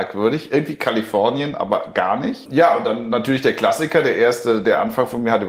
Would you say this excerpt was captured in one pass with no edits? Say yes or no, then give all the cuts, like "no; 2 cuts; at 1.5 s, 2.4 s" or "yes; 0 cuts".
yes; 0 cuts